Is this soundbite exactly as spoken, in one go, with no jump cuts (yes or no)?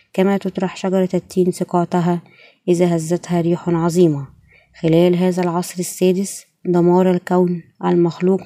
yes